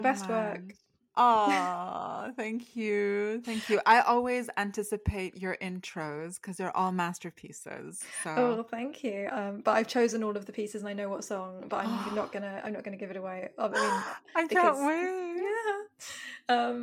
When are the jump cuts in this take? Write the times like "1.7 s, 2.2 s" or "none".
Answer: 9.3 s